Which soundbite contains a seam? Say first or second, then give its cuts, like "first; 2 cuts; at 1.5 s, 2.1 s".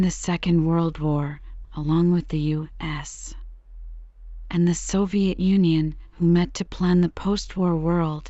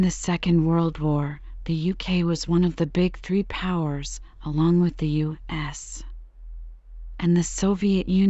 first; 1 cut; at 1.6 s